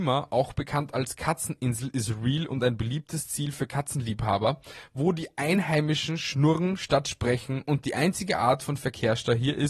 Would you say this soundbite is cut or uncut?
uncut